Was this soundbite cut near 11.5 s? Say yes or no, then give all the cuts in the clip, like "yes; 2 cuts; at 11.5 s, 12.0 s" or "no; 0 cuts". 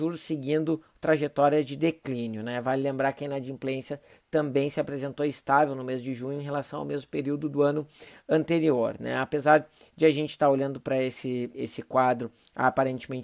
yes; 1 cut; at 11.5 s